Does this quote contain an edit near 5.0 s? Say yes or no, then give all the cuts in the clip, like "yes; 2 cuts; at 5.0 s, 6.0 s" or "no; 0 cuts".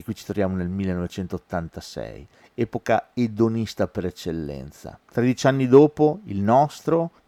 yes; 1 cut; at 5.0 s